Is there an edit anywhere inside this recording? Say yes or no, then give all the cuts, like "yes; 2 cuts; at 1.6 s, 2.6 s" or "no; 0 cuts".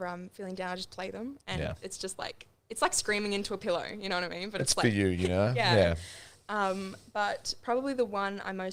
no; 0 cuts